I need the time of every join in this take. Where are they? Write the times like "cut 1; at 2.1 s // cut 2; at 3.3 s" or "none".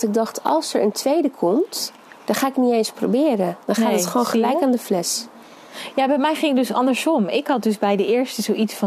none